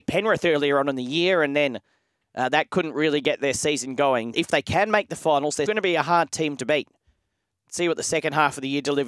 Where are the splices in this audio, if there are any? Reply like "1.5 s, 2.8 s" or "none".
4.3 s, 5.7 s